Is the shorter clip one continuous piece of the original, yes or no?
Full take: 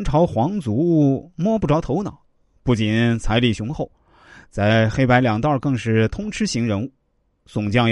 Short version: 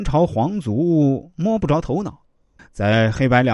no